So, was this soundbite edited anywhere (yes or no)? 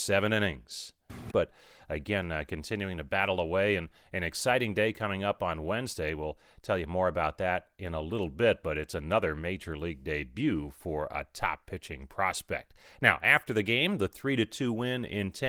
yes